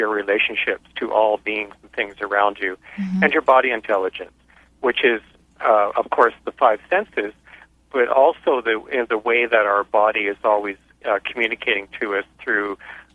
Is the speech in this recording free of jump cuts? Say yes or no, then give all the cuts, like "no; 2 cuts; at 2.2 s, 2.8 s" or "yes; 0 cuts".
yes; 0 cuts